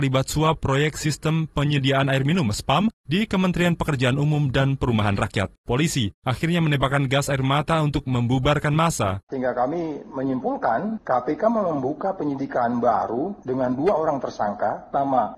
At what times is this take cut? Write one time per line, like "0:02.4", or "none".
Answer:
0:05.5
0:09.3